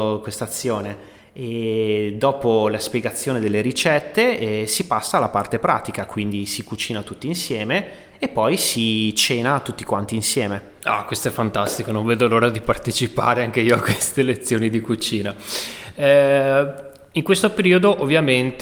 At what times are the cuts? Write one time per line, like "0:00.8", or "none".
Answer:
none